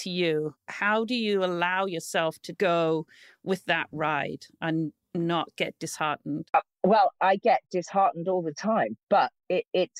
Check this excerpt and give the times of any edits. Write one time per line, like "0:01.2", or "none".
0:02.5